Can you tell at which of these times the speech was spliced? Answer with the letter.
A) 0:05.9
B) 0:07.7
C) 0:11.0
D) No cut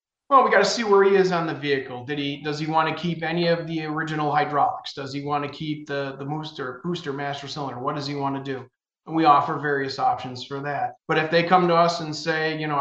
C